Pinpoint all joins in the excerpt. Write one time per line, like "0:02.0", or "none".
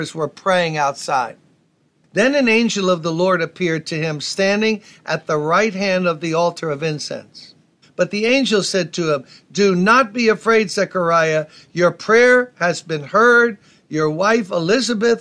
0:07.8